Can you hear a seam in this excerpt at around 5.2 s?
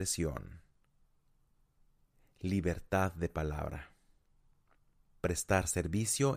yes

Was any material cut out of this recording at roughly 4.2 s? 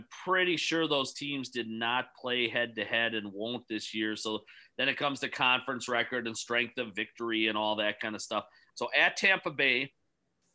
no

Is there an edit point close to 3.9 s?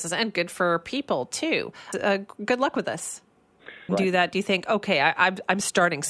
yes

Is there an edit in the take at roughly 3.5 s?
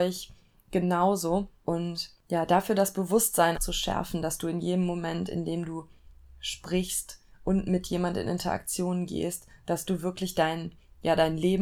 yes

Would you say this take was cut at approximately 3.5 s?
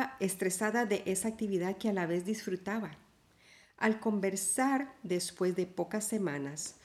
no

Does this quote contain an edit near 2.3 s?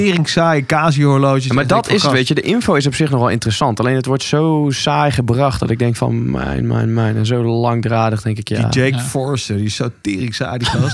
no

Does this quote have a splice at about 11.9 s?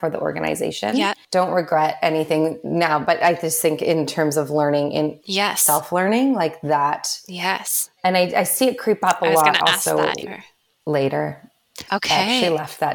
yes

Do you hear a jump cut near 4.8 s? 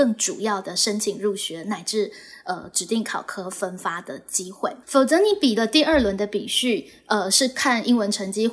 yes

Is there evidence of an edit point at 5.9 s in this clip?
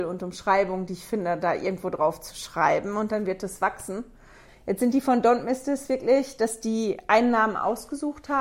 no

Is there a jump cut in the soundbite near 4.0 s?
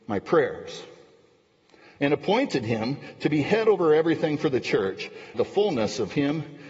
no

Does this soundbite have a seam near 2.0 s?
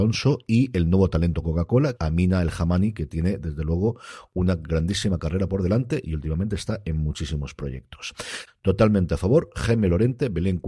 yes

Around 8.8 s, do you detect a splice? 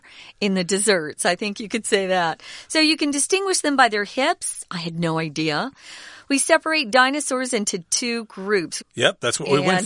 yes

